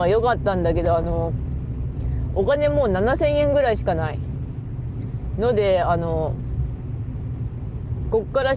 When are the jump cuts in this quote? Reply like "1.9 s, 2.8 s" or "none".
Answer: none